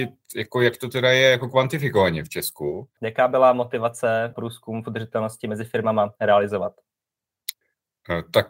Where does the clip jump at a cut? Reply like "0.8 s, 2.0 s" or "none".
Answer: 3.0 s, 4.3 s